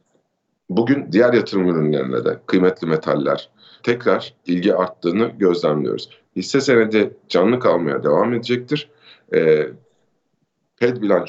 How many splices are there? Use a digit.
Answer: 1